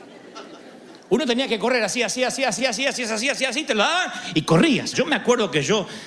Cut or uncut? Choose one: cut